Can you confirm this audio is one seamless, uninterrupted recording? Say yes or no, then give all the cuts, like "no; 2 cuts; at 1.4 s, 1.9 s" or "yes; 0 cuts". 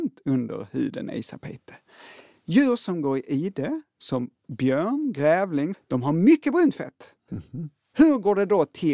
no; 2 cuts; at 5.7 s, 7.3 s